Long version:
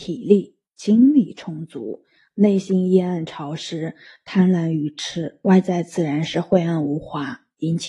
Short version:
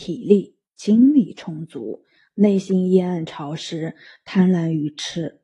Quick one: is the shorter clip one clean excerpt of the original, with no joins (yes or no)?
yes